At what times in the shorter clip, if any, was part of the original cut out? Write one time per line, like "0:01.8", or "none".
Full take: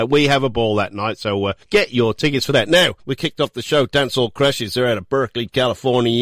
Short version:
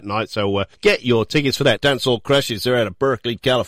0:01.8

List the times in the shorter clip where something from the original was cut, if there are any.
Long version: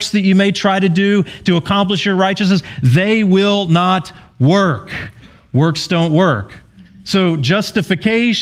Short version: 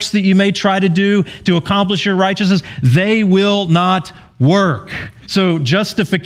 0:05.3

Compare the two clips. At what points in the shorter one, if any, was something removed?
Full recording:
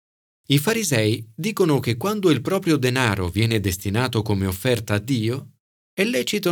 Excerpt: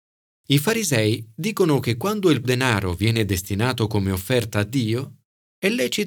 0:02.4

